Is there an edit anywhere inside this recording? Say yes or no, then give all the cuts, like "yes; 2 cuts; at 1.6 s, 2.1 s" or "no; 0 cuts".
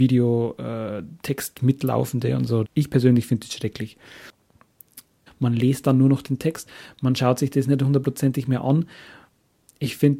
yes; 2 cuts; at 2.6 s, 5.3 s